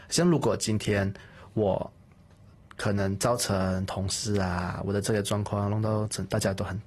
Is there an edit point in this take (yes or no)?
no